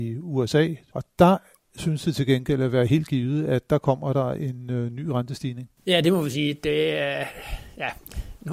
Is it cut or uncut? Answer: cut